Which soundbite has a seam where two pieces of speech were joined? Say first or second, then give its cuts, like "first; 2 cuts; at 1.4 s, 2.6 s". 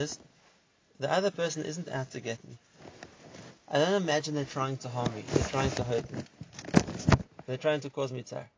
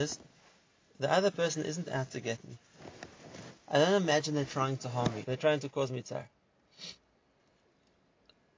second; 1 cut; at 5.2 s